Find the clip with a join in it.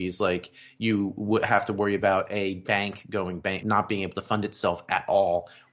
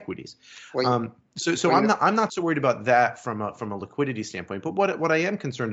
first; 1 cut; at 3.6 s

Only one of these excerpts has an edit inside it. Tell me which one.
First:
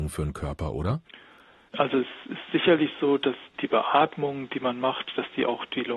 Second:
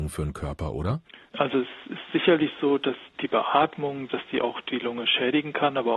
second; 2 cuts; at 1.3 s, 4.1 s

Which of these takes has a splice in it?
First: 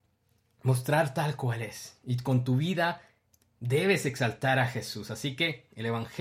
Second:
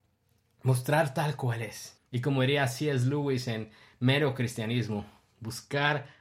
second; 1 cut; at 2.0 s

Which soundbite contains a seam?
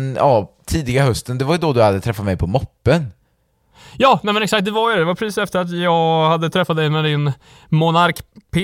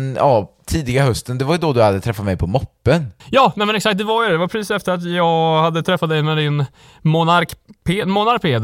second; 1 cut; at 3.2 s

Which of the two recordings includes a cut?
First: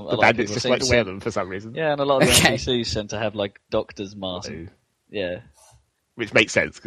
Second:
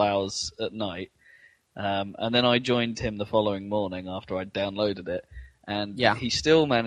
first; 1 cut; at 4.4 s

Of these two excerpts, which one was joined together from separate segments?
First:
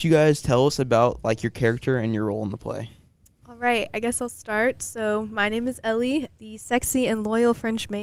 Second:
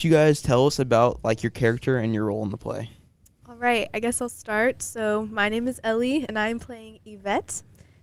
first; 1 cut; at 6.3 s

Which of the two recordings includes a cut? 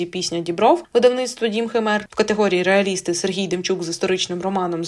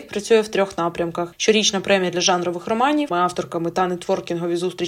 second; 1 cut; at 3.1 s

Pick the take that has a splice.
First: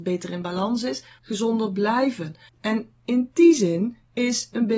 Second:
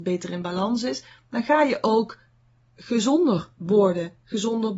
first; 2 cuts; at 1.2 s, 2.5 s

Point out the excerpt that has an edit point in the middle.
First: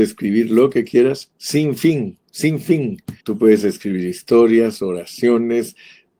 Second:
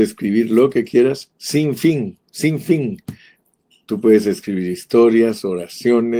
first; 1 cut; at 3.2 s

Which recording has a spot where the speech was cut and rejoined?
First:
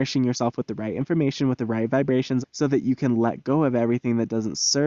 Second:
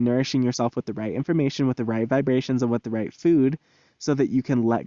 first; 1 cut; at 2.4 s

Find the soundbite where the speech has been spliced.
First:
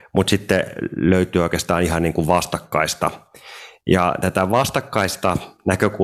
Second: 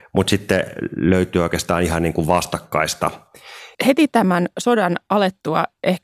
second; 1 cut; at 3.7 s

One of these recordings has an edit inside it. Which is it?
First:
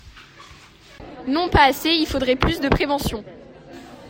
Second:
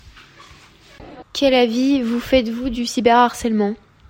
second; 1 cut; at 1.2 s

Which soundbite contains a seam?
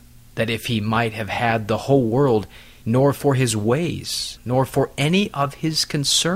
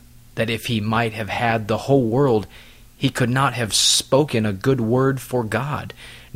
first; 2 cuts; at 2.8 s, 4.4 s

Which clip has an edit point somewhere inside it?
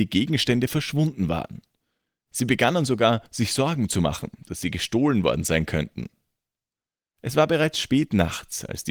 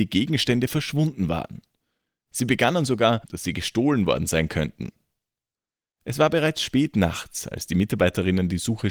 second; 1 cut; at 3.2 s

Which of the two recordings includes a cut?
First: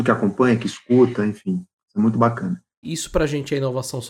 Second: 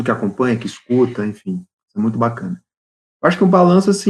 first; 1 cut; at 2.8 s

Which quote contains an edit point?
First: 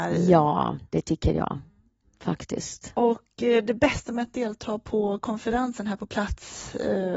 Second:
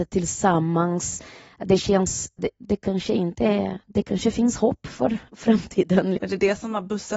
second; 2 cuts; at 2.4 s, 6.2 s

